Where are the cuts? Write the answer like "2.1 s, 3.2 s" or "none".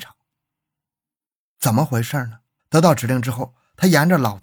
2.6 s